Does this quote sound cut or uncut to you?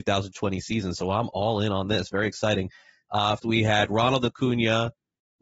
cut